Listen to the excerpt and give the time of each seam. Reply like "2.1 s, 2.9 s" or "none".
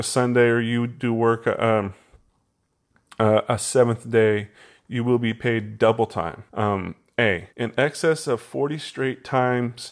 6.5 s, 7.5 s